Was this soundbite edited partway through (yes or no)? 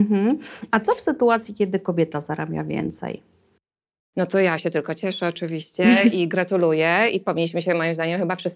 no